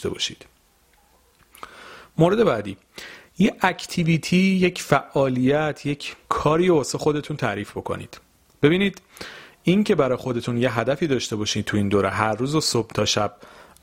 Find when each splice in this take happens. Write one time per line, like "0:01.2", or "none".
0:06.2